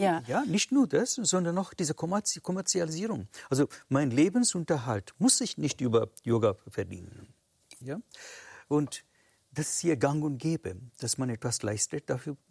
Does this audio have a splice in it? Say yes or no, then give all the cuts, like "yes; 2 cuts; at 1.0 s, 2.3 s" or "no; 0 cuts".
yes; 1 cut; at 7.8 s